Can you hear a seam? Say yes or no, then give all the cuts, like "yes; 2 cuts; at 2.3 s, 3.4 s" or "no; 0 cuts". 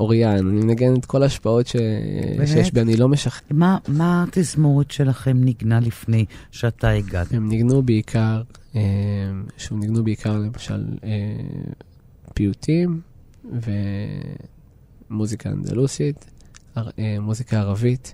yes; 2 cuts; at 3.4 s, 7.3 s